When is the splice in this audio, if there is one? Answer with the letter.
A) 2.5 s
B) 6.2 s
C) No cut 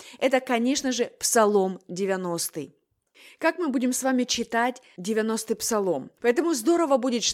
B